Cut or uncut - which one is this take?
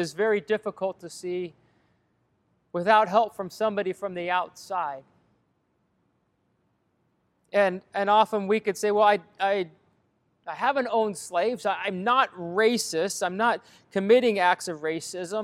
uncut